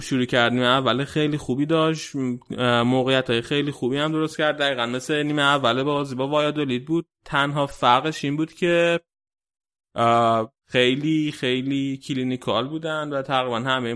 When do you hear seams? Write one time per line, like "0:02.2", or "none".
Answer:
0:10.6

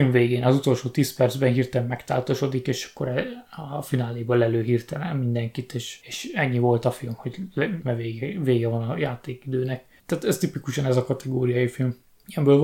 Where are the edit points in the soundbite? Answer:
0:07.8

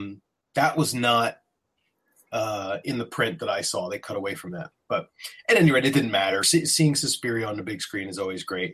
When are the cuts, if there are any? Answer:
none

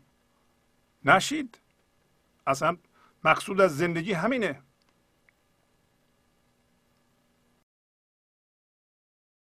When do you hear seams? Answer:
none

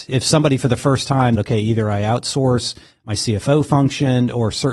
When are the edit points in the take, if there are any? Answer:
0:01.4

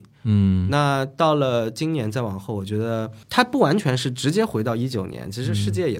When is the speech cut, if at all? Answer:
0:03.2

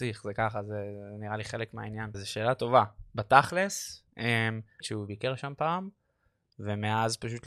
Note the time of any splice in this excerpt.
0:02.1
0:04.8

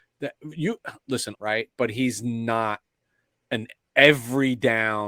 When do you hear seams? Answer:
0:01.3

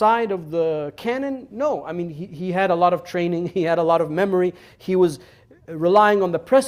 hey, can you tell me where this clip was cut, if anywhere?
0:01.5

